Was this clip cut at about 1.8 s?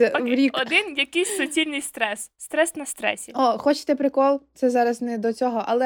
no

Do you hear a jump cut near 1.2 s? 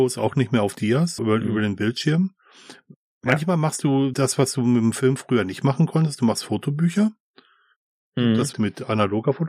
yes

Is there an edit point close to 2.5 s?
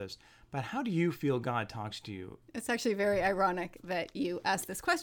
yes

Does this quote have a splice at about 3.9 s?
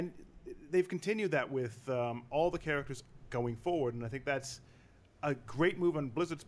no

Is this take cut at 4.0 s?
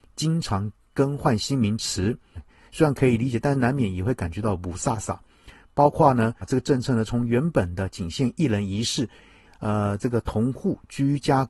no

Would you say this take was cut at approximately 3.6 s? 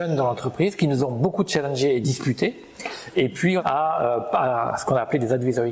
yes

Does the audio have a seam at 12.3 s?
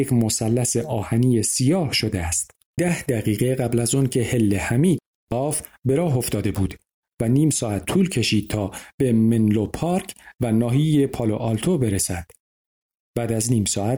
no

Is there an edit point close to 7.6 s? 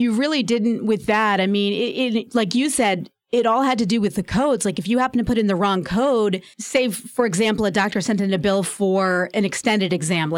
no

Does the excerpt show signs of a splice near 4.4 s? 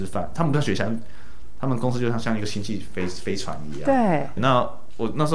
yes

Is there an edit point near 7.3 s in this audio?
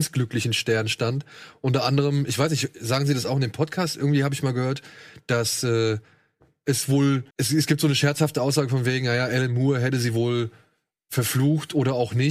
yes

